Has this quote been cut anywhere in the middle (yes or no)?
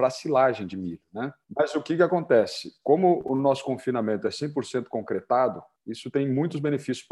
no